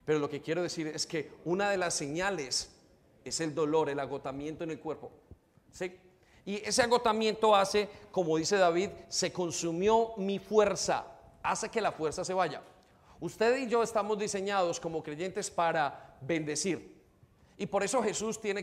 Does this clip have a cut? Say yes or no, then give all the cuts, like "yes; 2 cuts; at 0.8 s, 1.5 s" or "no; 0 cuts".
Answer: no; 0 cuts